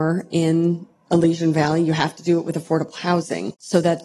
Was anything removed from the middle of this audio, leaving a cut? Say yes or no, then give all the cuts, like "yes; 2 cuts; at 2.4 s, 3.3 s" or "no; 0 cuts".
no; 0 cuts